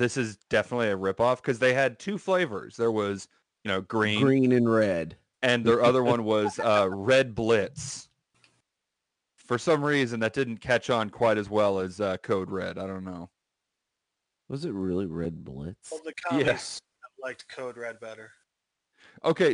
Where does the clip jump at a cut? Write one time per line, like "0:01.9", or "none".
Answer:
none